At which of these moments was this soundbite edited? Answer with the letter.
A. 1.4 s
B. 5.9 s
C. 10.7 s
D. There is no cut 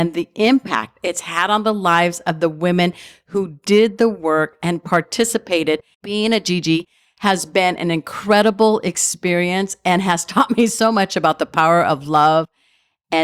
B